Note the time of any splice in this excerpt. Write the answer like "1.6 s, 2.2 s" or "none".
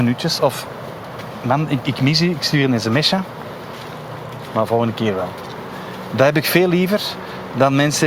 1.8 s, 4.5 s